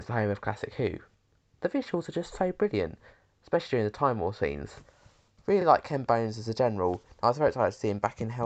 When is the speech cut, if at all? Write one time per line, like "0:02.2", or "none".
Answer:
none